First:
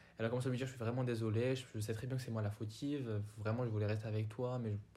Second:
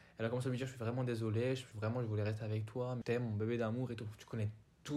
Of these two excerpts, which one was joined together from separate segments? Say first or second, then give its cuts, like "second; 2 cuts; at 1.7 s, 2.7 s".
second; 2 cuts; at 1.7 s, 3.0 s